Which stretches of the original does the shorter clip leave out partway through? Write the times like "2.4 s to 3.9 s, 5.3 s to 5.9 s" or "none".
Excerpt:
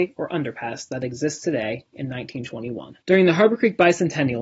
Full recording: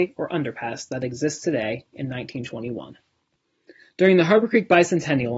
3.0 s to 3.9 s